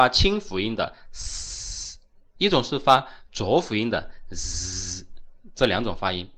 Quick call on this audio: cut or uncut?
uncut